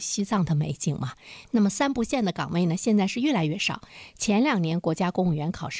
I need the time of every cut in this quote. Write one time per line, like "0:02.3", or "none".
0:01.4